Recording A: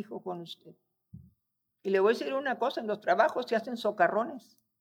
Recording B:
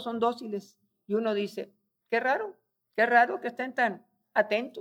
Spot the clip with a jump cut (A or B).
A